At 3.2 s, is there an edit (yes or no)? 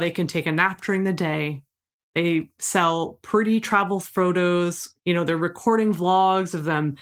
no